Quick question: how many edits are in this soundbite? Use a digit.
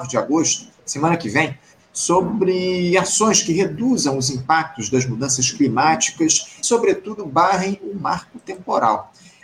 1